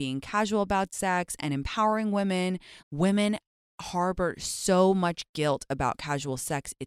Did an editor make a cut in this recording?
yes; 1 cut; at 2.8 s

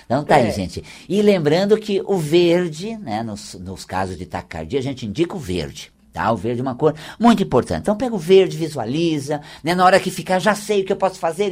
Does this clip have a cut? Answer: no; 0 cuts

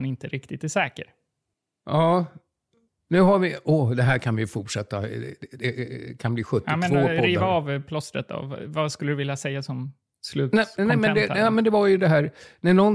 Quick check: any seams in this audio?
no; 0 cuts

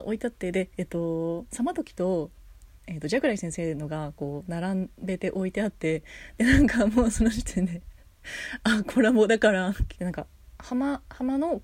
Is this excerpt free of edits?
no; 1 cut; at 10.0 s

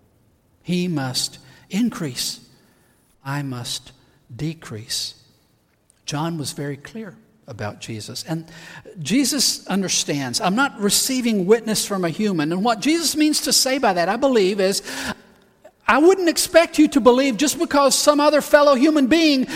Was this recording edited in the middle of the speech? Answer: no; 0 cuts

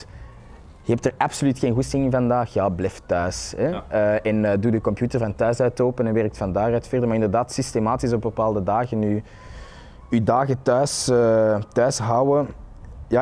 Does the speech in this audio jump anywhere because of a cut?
no; 0 cuts

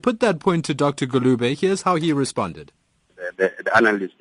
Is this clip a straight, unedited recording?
yes; 0 cuts

